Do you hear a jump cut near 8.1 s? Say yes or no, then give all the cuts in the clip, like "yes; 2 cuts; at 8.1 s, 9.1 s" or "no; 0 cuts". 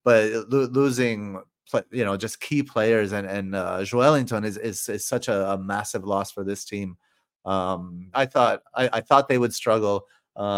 yes; 1 cut; at 8.1 s